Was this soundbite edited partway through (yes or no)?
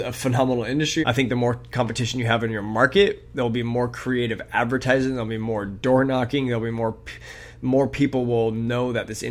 yes